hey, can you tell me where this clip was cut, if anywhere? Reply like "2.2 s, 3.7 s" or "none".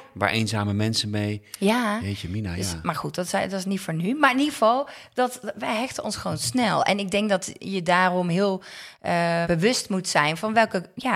9.4 s